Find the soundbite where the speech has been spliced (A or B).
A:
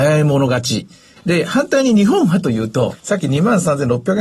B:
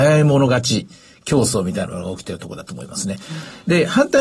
A